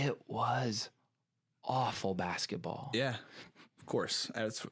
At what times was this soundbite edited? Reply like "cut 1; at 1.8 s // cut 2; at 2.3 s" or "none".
cut 1; at 3.8 s